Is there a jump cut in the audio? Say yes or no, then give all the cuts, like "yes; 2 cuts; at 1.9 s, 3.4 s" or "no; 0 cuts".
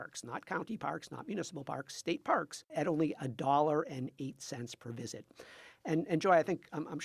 no; 0 cuts